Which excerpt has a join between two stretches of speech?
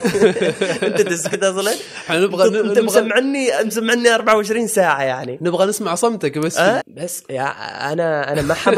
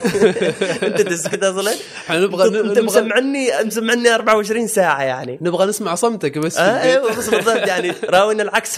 first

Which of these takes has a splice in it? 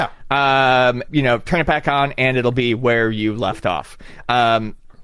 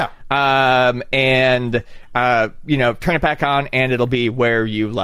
first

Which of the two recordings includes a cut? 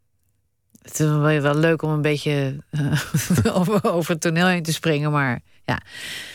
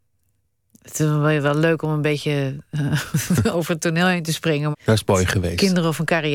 second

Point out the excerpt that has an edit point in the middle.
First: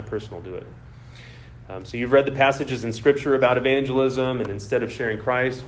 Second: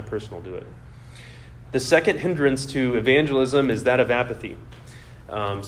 second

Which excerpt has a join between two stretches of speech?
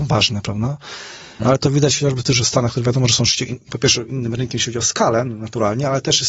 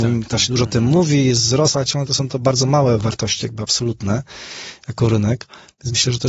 first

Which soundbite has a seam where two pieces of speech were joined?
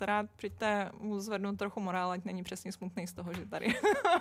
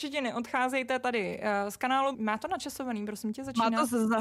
second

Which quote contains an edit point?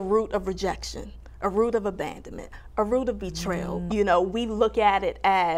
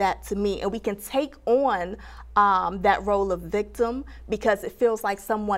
first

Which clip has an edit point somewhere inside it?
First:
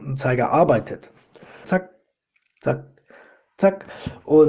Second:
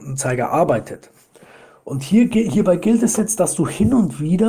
first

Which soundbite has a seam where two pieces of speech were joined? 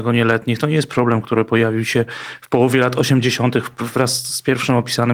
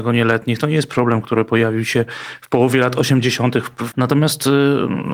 second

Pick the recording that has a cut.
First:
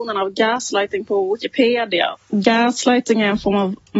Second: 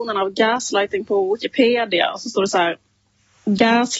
first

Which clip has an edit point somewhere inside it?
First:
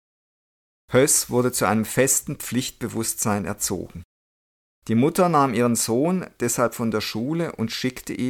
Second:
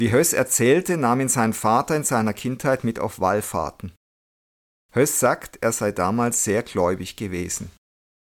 first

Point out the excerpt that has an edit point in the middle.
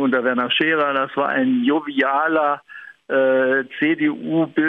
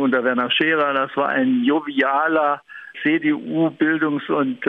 second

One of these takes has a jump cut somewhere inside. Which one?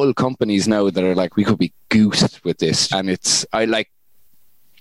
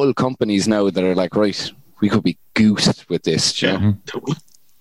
first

